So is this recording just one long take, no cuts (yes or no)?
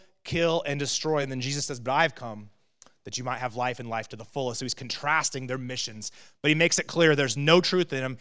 yes